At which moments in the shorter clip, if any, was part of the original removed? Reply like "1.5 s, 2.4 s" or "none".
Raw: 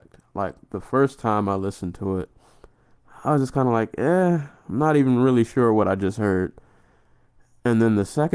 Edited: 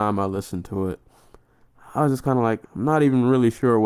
2.6 s

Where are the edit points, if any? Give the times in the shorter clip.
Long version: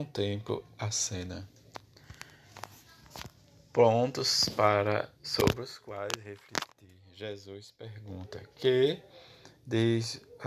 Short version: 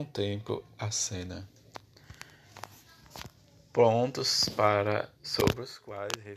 none

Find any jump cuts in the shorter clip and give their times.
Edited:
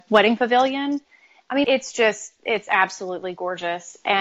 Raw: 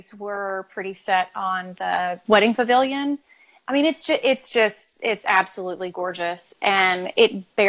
1.6 s

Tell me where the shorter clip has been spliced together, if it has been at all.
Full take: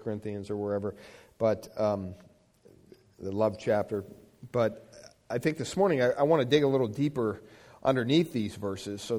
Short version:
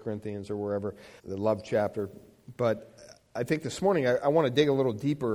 1.2 s

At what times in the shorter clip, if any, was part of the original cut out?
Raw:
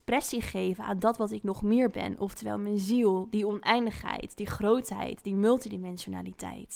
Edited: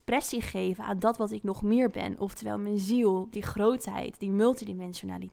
3.3 s

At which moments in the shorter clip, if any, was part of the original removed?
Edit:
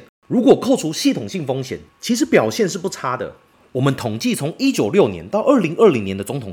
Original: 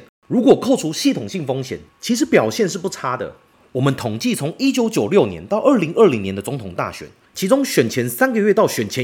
4.7 s

